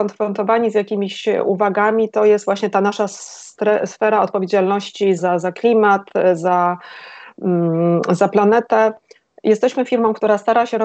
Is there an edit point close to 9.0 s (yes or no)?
no